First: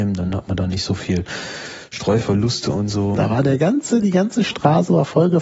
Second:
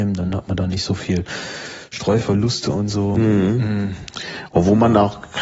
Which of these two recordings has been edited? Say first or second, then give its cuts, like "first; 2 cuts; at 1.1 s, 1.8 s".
first; 1 cut; at 3.1 s